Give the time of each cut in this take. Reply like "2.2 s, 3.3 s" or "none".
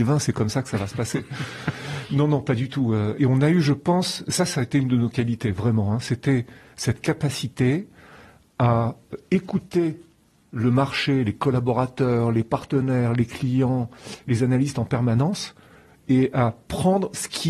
3.2 s